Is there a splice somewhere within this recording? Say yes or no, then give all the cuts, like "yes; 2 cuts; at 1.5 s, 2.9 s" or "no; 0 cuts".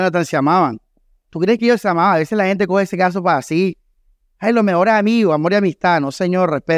no; 0 cuts